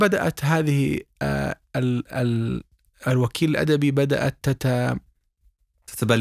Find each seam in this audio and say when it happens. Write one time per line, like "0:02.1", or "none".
none